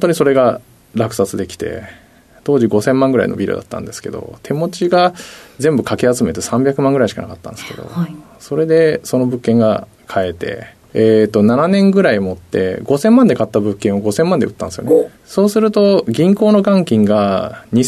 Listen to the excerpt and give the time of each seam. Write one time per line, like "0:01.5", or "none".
none